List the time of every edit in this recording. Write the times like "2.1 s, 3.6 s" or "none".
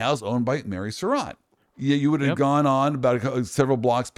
1.7 s